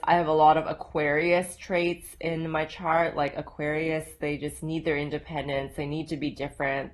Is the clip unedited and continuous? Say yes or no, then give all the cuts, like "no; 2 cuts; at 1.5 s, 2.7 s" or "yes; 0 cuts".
yes; 0 cuts